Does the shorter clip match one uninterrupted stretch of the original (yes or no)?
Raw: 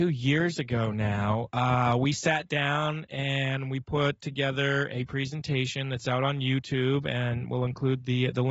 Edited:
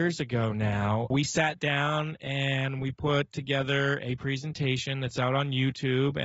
no